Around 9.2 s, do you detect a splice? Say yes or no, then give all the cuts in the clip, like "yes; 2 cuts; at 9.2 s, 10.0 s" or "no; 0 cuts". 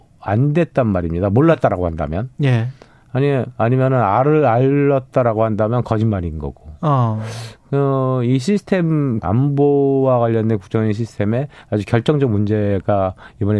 yes; 1 cut; at 9.2 s